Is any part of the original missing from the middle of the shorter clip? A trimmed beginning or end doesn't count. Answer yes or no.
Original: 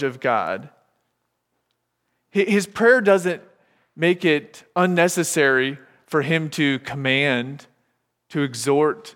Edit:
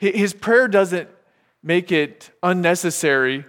no